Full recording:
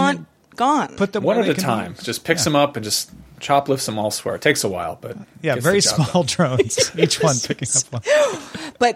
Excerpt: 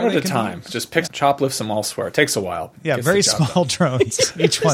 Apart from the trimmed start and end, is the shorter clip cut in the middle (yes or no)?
yes